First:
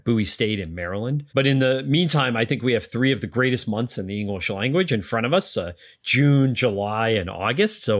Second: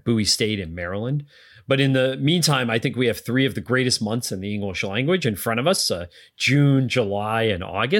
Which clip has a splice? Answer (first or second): first